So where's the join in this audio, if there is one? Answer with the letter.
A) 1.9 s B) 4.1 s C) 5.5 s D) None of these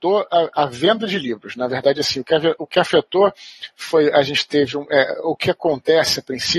D